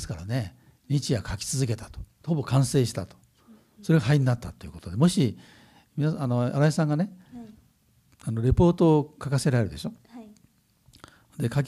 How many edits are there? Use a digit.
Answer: 1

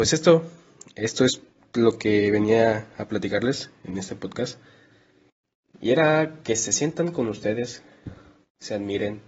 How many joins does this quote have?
0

